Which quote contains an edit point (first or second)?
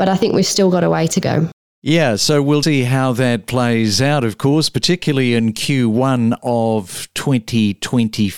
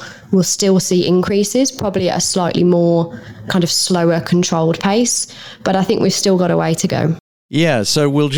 first